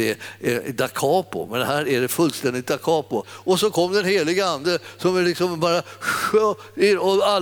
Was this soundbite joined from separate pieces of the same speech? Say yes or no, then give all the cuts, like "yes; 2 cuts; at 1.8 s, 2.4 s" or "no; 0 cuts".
yes; 1 cut; at 3.2 s